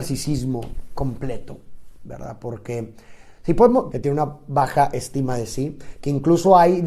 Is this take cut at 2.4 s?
no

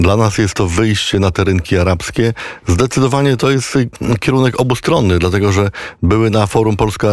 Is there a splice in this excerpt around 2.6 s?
yes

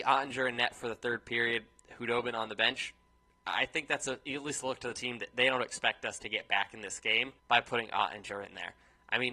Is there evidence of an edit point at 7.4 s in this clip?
yes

